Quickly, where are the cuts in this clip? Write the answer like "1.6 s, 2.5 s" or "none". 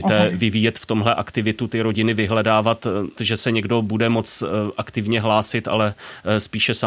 3.2 s

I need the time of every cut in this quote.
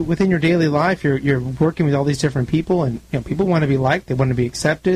none

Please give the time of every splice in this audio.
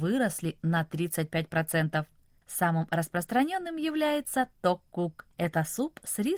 2.4 s

